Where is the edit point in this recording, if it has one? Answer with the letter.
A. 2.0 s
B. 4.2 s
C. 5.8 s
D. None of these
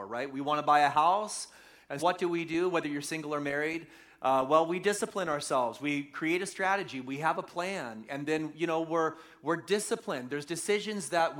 A